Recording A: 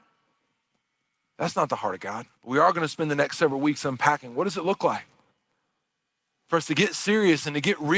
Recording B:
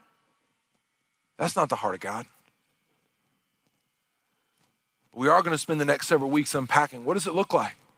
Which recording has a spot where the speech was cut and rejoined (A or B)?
A